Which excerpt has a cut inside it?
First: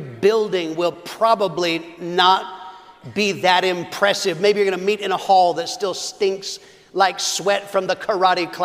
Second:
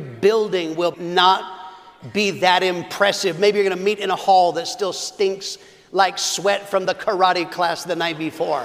second; 1 cut; at 0.9 s

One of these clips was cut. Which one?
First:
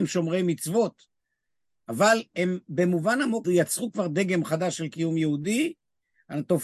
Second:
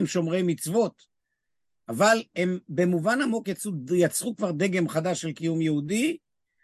first; 1 cut; at 3.4 s

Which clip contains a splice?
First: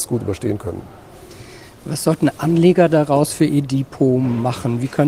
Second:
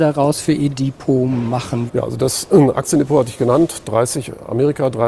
second; 1 cut; at 1.9 s

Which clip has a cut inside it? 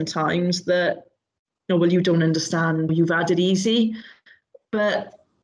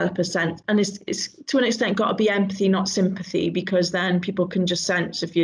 first; 1 cut; at 2.9 s

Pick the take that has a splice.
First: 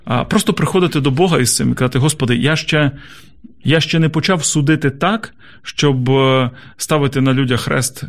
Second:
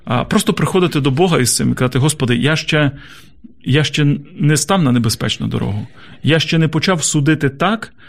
first; 1 cut; at 3.6 s

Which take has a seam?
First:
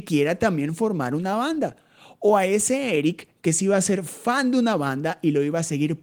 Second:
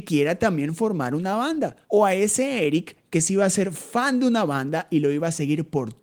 second; 1 cut; at 1.8 s

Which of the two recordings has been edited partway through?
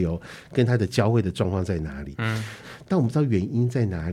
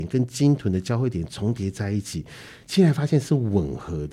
first; 1 cut; at 2.6 s

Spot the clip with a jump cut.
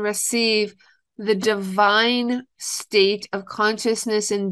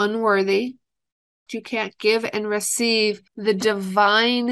second; 2 cuts; at 1.5 s, 3.3 s

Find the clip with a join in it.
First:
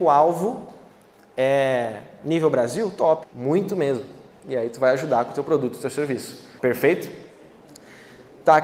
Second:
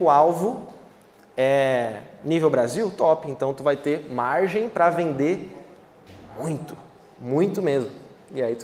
first; 2 cuts; at 3.2 s, 6.6 s

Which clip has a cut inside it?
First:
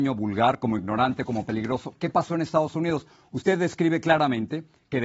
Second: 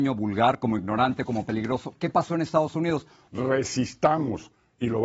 second; 1 cut; at 3.3 s

